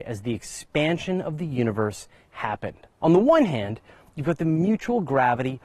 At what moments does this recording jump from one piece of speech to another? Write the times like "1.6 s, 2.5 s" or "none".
2.9 s